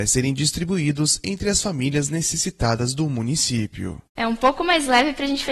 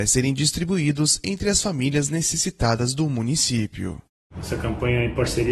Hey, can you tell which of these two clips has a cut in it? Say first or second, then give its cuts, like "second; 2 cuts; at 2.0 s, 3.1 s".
first; 1 cut; at 4.2 s